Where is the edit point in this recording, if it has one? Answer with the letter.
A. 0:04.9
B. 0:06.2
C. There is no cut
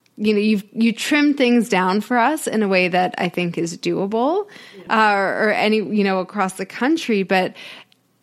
A